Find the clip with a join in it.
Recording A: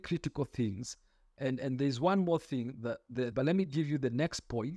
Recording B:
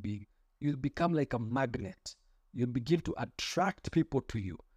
A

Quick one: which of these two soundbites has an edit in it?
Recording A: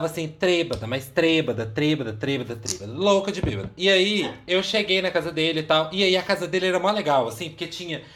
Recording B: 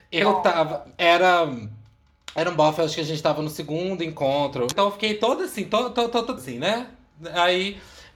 B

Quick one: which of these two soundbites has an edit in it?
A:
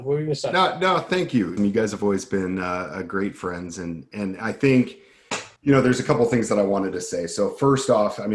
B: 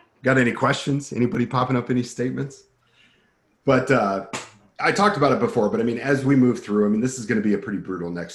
A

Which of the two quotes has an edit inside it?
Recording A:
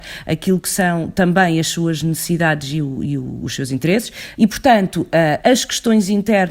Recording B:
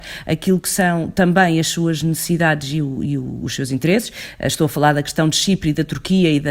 A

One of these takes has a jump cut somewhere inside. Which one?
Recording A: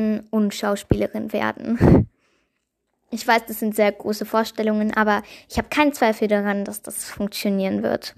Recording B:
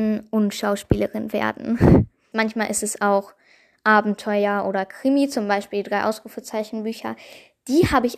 B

